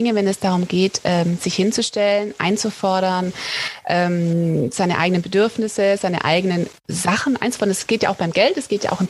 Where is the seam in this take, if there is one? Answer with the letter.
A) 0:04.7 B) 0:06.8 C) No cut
B